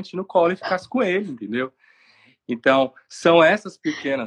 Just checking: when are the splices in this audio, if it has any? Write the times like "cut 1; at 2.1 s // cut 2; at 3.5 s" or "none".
none